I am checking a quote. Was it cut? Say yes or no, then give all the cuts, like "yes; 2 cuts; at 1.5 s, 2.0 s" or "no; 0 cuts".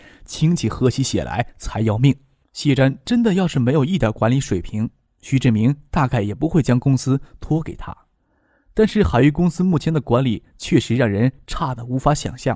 yes; 1 cut; at 2.4 s